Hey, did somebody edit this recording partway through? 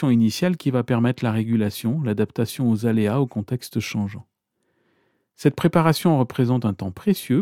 no; 0 cuts

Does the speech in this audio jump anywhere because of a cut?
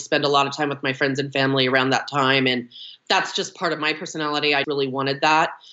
yes; 1 cut; at 4.6 s

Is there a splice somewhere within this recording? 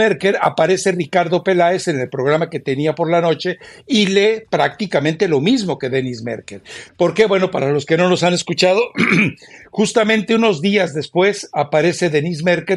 yes; 1 cut; at 6.9 s

